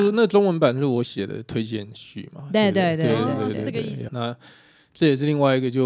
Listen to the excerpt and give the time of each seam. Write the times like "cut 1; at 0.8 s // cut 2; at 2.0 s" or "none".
cut 1; at 4.1 s